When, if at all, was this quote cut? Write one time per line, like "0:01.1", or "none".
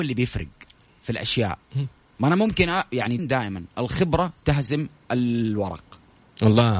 0:03.2